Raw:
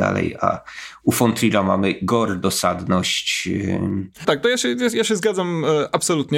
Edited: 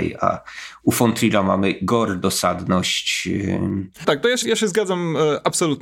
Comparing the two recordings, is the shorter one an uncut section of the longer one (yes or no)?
no